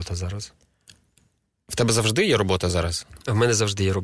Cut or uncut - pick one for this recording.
uncut